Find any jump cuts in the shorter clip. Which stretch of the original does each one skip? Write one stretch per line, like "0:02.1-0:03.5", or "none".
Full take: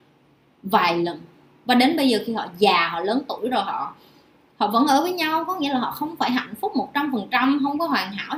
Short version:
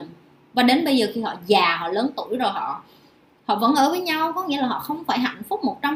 none

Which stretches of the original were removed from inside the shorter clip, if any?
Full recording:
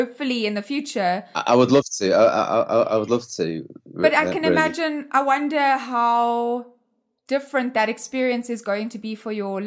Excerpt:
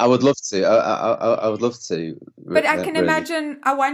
none

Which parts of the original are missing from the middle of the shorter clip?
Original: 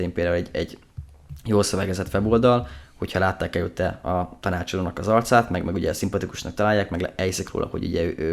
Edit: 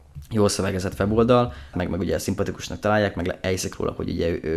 0:02.9-0:05.5

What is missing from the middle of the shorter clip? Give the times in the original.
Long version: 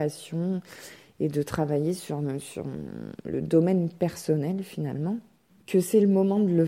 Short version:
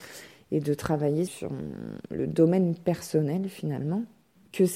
0:02.0-0:02.4

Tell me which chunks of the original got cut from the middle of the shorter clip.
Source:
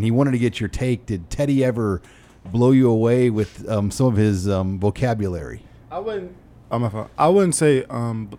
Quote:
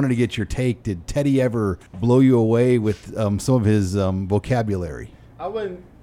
0:02.1-0:02.4

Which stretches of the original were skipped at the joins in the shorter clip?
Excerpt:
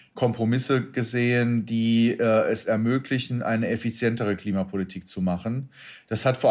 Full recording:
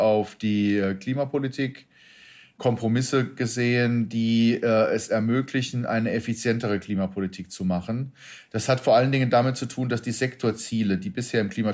none

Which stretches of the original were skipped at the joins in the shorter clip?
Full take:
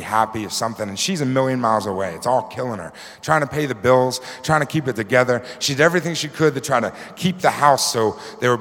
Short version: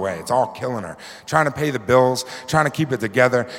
none

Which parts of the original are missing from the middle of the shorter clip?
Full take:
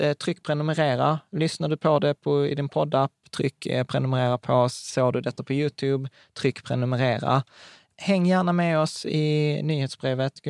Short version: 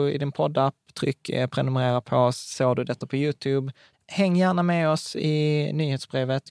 0:06.3-0:07.8

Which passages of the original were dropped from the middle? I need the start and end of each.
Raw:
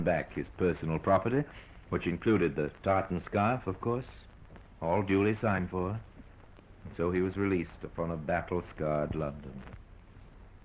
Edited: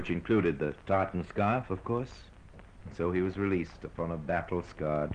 0:04.7-0:06.8

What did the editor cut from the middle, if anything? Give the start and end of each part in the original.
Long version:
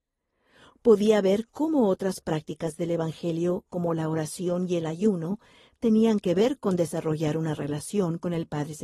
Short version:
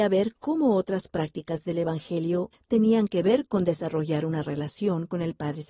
0:03.7-0:05.6

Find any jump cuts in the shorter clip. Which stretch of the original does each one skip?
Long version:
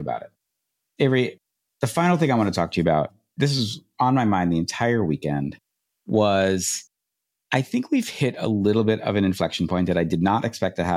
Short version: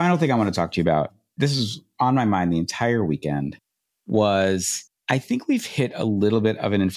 0:07.0-0:07.4

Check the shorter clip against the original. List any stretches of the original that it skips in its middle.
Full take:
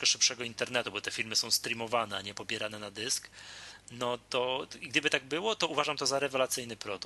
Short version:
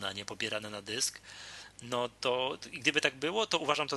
none

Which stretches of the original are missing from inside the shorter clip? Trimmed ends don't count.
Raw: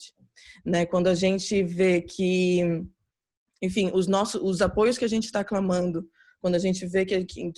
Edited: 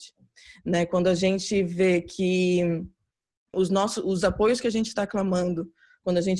0:03.5-0:03.9

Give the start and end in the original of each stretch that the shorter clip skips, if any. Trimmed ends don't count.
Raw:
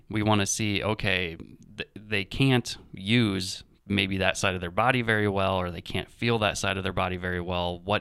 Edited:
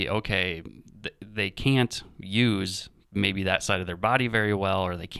none

